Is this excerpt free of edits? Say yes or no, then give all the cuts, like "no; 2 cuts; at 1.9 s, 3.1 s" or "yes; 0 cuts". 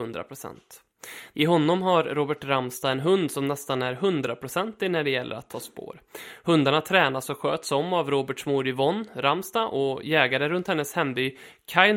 no; 1 cut; at 1.3 s